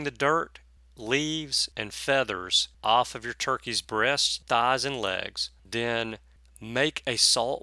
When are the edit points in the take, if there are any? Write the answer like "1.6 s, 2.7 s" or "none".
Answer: none